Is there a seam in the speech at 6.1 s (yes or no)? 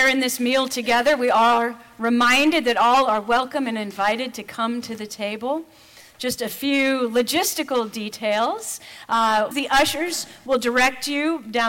no